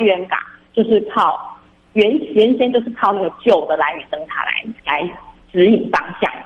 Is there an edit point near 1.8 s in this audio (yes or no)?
no